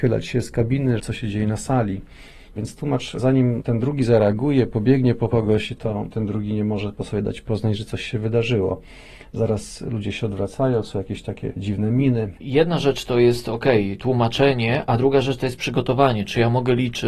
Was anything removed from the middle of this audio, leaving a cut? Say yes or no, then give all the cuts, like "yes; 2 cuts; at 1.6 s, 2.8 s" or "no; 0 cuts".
yes; 2 cuts; at 1.0 s, 12.4 s